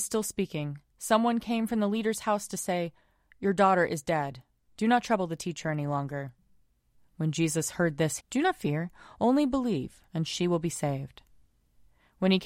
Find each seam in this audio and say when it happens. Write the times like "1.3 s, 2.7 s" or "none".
8.2 s, 10.1 s